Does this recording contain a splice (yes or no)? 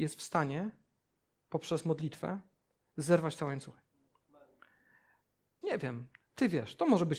yes